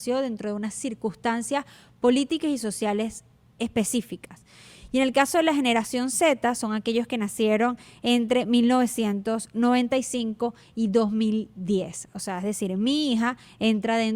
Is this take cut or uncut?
uncut